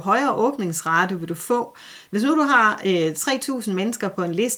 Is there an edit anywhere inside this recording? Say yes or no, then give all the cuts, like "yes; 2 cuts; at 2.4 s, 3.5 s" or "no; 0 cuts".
yes; 1 cut; at 2.1 s